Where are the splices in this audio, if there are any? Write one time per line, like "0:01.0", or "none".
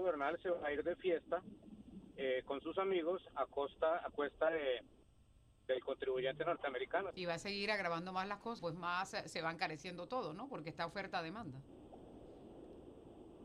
0:07.1
0:08.6